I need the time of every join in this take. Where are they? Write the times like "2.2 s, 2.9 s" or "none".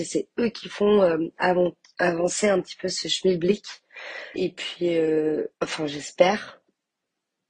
4.4 s, 5.5 s